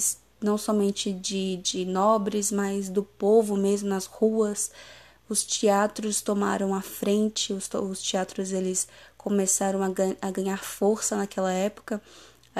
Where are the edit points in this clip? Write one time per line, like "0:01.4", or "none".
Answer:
none